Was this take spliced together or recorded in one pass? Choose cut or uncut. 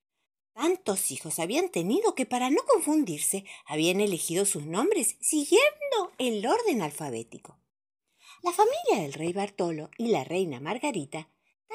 cut